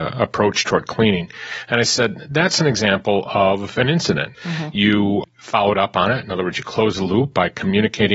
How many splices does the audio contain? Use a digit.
1